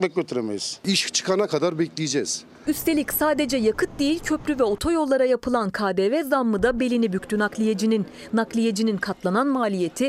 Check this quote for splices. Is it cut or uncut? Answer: cut